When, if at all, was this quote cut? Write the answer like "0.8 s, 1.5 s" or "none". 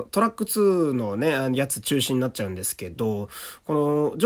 none